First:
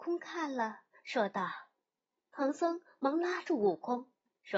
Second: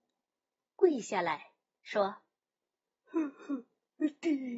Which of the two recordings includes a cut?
first; 1 cut; at 2.2 s

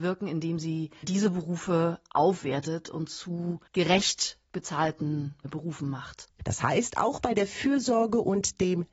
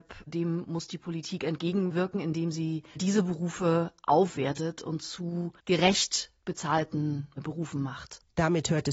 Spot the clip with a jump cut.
first; 1 cut; at 6.4 s

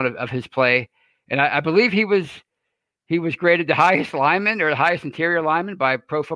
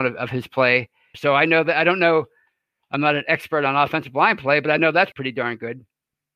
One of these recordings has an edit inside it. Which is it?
second; 2 cuts; at 1.1 s, 5.1 s

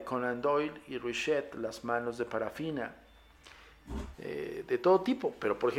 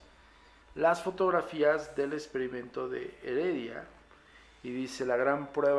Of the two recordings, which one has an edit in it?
first; 1 cut; at 4.1 s

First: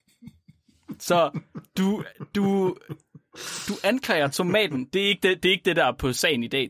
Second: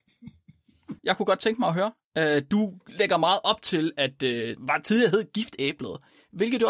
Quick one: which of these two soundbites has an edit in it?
second; 2 cuts; at 1.0 s, 4.6 s

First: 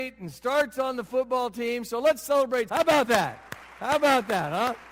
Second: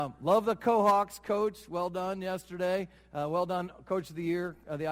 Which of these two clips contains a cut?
first; 1 cut; at 2.7 s

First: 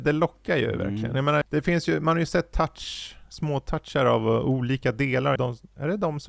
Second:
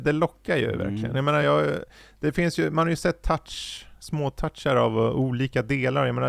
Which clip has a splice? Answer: first; 2 cuts; at 1.4 s, 5.4 s

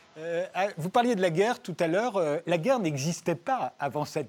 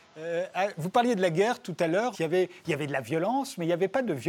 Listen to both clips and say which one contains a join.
second; 1 cut; at 2.1 s

